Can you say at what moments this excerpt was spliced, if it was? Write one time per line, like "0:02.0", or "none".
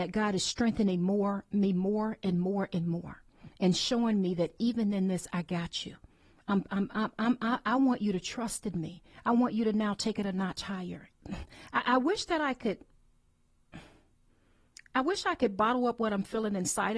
0:11.1